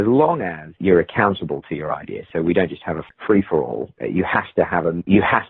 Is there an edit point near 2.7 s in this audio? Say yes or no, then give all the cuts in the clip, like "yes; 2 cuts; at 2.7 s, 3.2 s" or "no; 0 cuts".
no; 0 cuts